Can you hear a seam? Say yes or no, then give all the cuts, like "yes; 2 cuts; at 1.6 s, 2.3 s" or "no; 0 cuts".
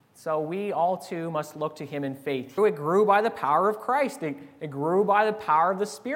yes; 1 cut; at 2.6 s